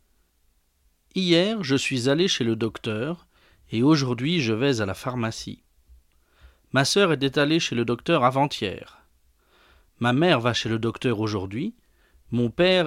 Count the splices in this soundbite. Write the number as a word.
zero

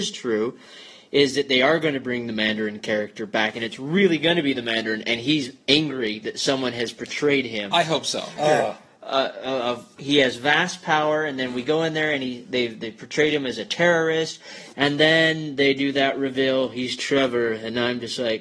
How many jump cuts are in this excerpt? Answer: two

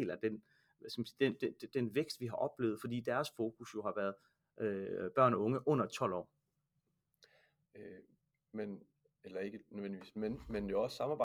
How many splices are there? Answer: one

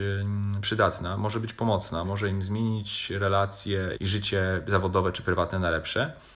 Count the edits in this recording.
two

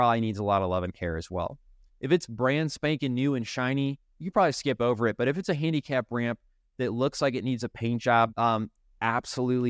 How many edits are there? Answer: two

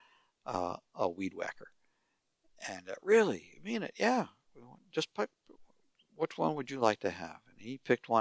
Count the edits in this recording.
zero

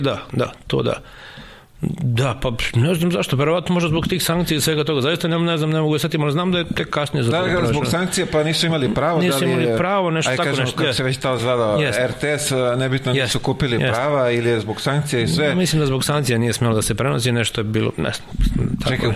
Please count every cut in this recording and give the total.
zero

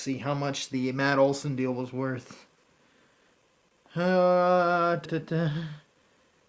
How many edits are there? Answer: one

